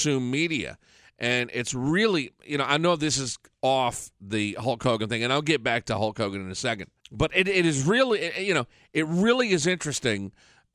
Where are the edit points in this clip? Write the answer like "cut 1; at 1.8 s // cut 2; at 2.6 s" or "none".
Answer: cut 1; at 7.0 s